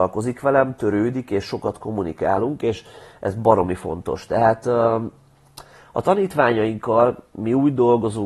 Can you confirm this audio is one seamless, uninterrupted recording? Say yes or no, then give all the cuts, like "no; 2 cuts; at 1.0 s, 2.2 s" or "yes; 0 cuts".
yes; 0 cuts